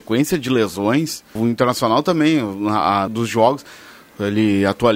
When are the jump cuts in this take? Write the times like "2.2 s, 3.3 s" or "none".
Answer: 1.4 s, 3.1 s